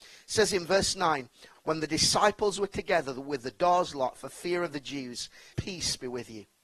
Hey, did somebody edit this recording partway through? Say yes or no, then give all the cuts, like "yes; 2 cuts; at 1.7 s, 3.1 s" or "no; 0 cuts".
yes; 2 cuts; at 1.6 s, 5.5 s